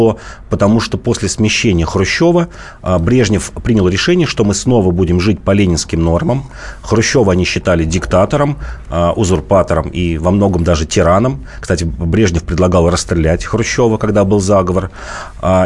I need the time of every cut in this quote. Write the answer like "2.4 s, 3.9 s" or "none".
none